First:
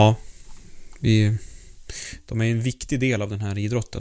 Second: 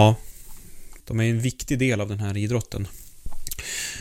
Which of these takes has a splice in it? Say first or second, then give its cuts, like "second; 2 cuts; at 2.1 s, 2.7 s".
second; 1 cut; at 1.0 s